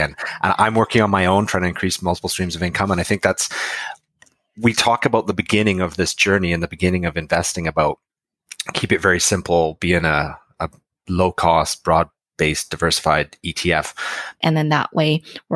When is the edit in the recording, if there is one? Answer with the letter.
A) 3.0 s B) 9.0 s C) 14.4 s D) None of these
C